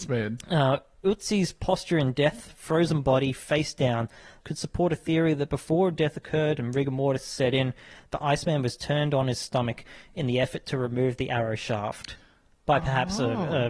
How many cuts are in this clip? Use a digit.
1